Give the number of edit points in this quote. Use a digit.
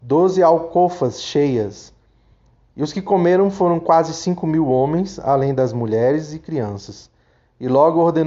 0